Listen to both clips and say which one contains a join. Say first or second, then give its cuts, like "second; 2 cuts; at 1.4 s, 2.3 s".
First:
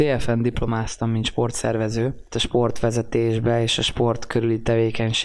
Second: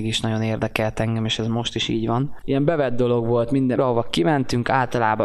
second; 2 cuts; at 2.4 s, 3.8 s